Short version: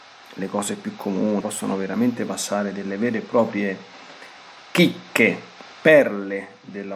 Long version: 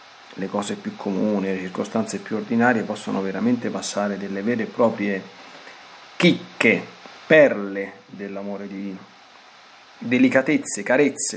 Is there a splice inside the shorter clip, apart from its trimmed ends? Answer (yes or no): yes